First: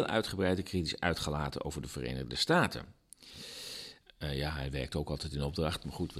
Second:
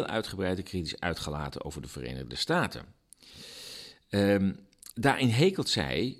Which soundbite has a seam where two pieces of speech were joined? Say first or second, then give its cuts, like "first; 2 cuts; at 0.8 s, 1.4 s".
first; 1 cut; at 4.0 s